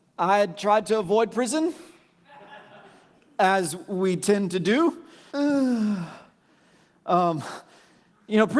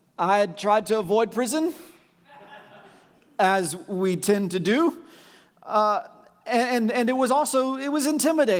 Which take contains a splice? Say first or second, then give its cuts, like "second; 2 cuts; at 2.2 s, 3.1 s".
first; 1 cut; at 5.3 s